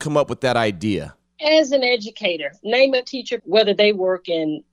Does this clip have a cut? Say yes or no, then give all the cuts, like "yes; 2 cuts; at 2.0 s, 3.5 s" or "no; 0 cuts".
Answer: yes; 1 cut; at 3.4 s